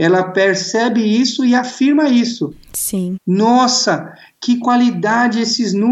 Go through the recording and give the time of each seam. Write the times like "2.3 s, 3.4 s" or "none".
3.2 s